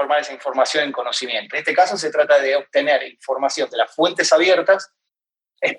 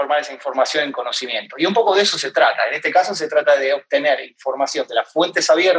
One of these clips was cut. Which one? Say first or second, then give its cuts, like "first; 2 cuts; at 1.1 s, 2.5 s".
first; 1 cut; at 1.5 s